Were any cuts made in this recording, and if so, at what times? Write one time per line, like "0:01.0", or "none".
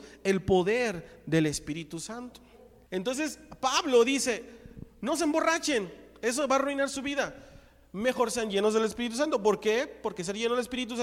0:02.9